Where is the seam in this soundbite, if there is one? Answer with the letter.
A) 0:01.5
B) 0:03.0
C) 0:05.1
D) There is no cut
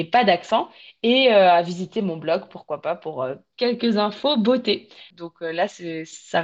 C